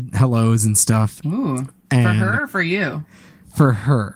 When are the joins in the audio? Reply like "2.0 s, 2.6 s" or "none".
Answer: 1.2 s

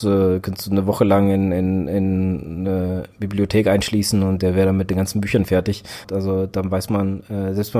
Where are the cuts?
6.0 s

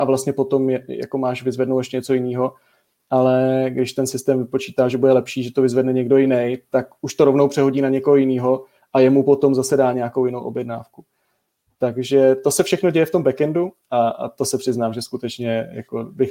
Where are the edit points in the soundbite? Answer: none

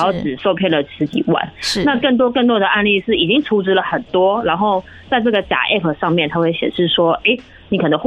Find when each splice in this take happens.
none

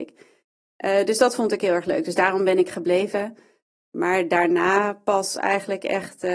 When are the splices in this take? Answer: none

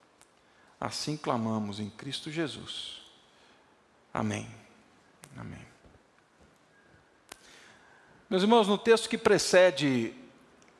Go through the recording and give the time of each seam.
none

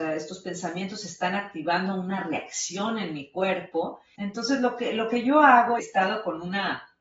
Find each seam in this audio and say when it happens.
4.2 s, 5.8 s

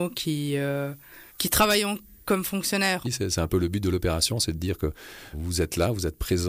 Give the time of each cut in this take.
1.3 s, 3.0 s, 5.3 s

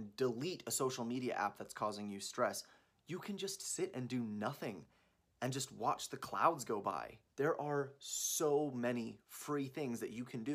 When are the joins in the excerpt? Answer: 7.3 s

